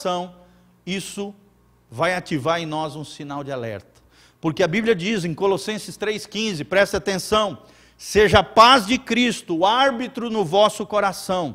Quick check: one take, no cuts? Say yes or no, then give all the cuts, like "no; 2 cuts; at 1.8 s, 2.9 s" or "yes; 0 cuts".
yes; 0 cuts